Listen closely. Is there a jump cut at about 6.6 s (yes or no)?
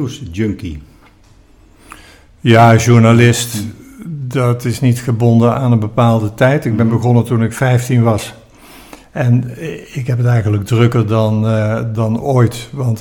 no